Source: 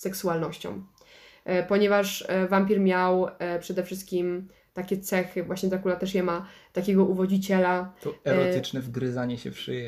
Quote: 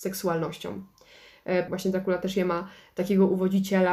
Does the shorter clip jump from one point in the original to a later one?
yes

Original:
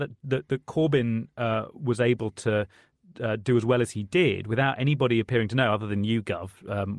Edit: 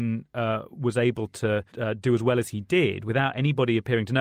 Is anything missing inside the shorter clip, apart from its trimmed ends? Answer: yes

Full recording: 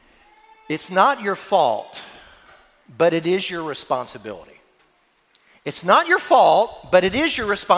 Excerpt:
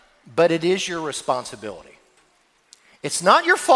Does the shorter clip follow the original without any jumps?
yes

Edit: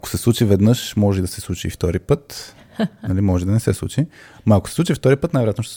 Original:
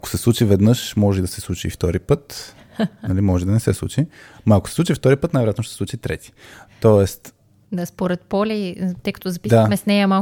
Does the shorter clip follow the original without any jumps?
yes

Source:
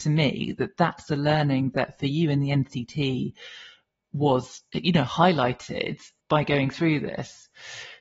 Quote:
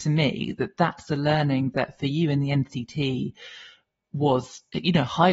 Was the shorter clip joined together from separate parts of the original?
no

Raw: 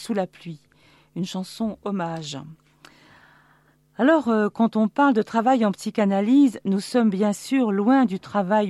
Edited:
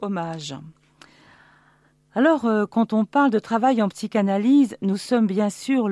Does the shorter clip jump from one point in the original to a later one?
no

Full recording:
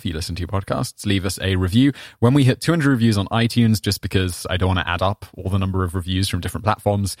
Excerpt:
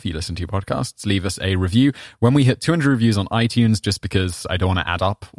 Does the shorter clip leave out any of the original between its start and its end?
no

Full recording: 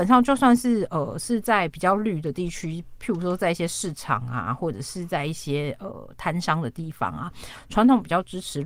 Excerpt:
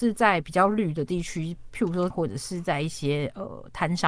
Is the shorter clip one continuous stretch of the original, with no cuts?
no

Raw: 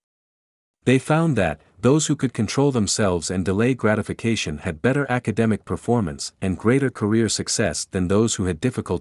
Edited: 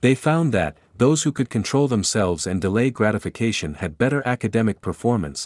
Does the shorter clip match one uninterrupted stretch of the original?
yes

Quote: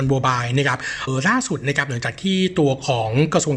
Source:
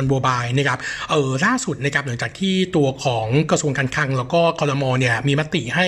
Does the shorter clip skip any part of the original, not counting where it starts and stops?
yes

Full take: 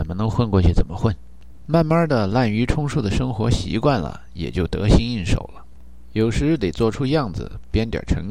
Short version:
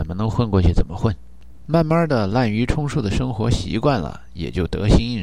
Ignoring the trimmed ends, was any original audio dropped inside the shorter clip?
no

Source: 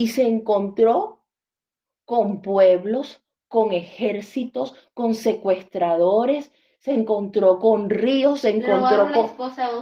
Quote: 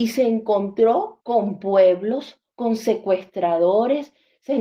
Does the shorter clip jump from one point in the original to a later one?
yes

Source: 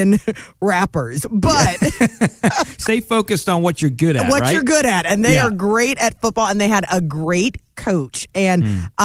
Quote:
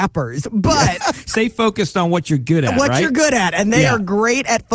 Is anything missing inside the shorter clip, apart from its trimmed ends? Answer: yes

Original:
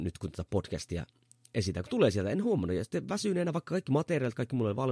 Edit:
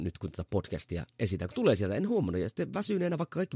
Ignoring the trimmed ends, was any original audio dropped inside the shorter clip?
yes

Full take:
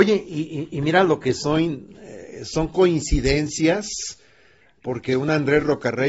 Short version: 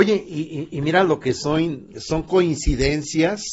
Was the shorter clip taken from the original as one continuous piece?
no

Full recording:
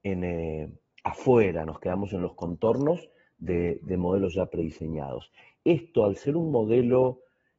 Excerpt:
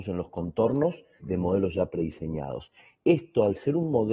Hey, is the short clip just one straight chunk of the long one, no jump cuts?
no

